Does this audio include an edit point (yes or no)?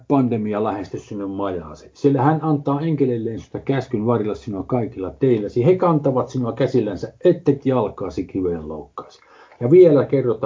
no